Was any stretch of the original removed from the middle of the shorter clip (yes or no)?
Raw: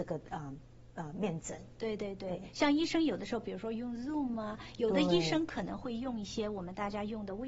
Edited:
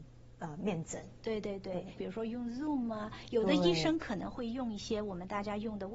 yes